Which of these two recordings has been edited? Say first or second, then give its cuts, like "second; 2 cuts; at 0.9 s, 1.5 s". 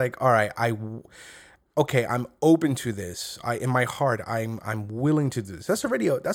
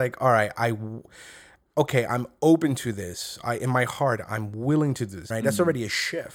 second; 2 cuts; at 4.2 s, 5.3 s